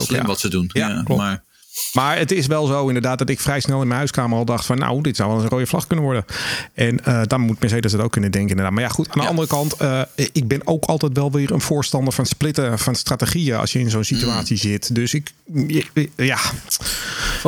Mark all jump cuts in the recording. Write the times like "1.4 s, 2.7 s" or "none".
none